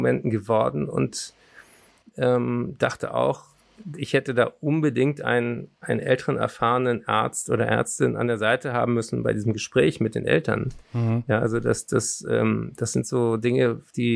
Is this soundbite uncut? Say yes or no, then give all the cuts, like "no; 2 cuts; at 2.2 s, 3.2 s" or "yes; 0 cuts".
yes; 0 cuts